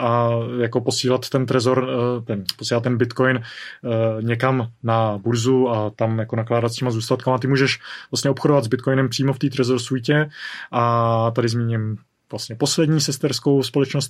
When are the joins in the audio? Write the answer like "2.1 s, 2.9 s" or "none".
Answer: none